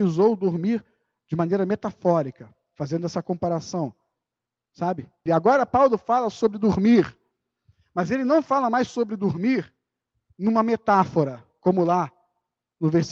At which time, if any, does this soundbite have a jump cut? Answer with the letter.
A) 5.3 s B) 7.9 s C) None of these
A